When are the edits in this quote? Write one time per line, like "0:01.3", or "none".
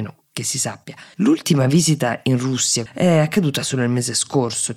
0:01.1
0:02.9

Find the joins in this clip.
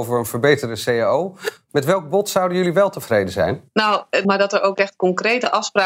0:04.2

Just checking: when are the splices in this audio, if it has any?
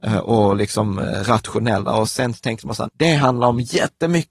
0:02.9

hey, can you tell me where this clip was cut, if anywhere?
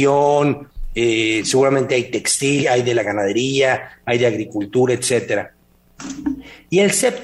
0:02.6

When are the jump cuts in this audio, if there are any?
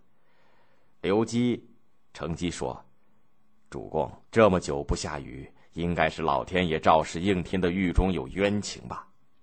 0:00.9
0:04.3

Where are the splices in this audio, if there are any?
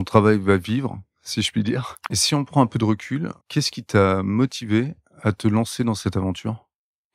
0:02.1
0:03.4

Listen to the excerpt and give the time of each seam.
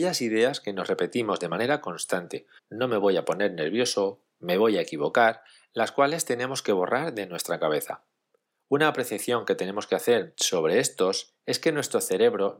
0:02.6

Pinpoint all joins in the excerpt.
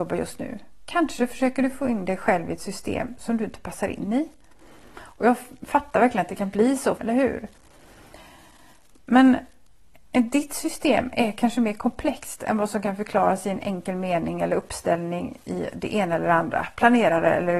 0:07.0

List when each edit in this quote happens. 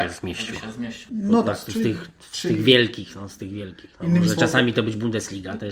0:01.1

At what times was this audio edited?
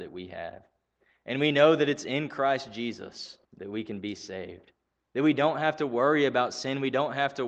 0:03.4

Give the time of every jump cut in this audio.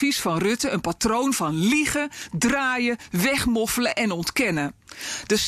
none

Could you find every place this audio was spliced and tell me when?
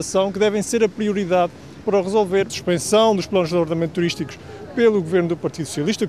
0:02.5

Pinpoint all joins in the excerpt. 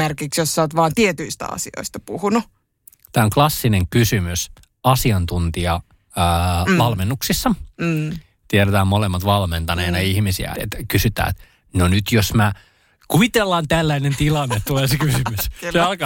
0:10.5

